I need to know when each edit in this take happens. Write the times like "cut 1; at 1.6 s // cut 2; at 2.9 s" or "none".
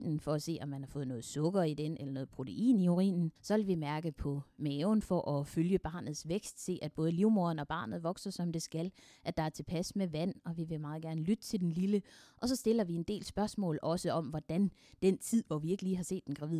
cut 1; at 3.4 s